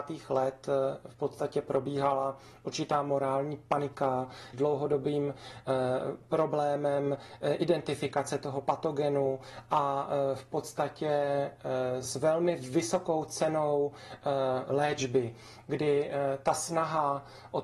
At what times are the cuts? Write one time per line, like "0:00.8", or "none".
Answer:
0:04.5
0:12.0